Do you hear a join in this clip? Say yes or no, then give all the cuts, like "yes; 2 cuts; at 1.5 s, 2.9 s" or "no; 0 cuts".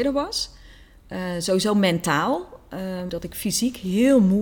yes; 1 cut; at 3.1 s